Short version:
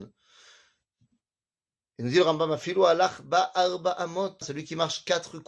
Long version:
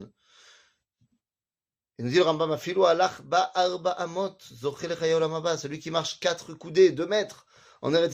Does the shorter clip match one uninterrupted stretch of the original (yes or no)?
no